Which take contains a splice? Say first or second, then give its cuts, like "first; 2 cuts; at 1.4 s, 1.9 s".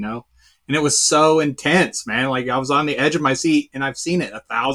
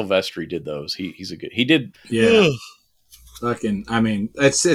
second; 1 cut; at 1.9 s